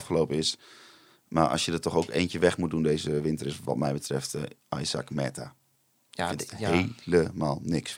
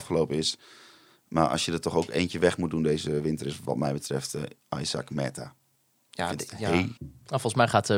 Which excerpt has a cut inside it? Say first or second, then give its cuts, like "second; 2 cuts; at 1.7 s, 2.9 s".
second; 1 cut; at 7.0 s